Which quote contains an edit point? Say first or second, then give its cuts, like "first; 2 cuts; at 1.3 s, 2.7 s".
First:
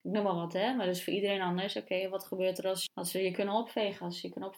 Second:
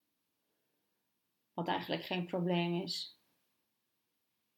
first; 1 cut; at 2.9 s